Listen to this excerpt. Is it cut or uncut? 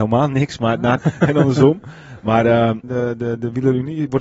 cut